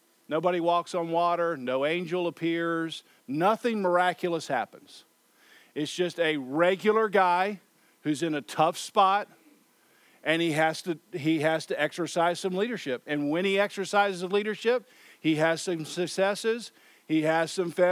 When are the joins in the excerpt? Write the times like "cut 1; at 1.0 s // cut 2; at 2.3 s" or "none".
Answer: none